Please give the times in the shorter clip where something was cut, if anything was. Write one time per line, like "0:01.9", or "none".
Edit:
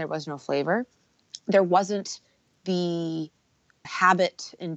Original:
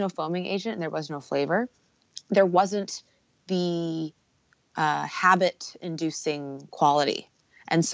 0:03.8